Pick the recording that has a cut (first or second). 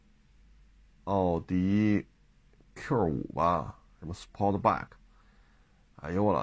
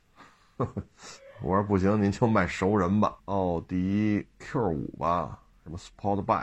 second